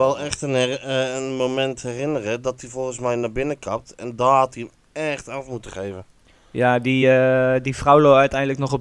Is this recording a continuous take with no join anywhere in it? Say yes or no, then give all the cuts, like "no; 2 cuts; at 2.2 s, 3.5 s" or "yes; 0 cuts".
yes; 0 cuts